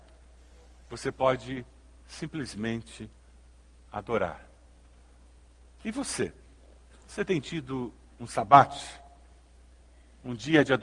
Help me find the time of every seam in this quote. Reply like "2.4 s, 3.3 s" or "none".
none